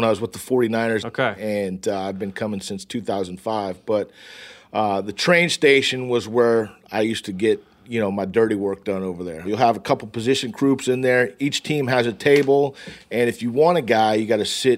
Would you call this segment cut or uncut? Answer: cut